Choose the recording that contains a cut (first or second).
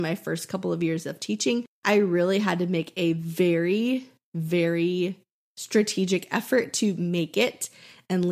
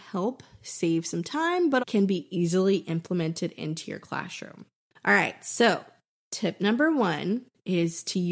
second